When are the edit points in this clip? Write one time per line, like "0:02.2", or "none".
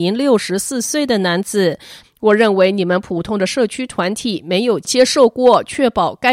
0:02.0